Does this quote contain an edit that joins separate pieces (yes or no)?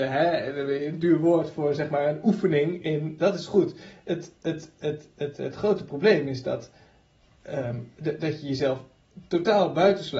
yes